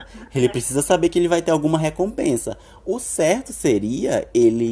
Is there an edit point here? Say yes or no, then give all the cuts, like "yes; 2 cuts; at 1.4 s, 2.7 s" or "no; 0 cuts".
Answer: no; 0 cuts